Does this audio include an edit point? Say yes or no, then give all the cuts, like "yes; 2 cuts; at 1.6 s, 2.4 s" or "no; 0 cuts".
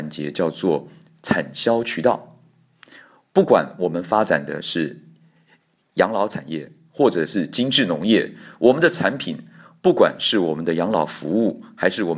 no; 0 cuts